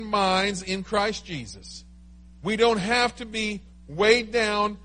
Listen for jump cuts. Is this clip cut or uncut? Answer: uncut